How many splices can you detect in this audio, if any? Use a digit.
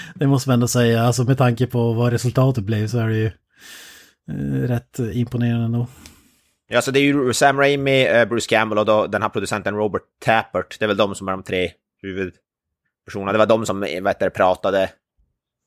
0